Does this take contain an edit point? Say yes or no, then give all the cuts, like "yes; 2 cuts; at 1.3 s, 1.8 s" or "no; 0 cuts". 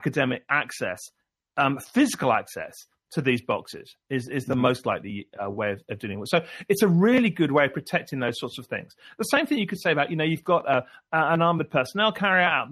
no; 0 cuts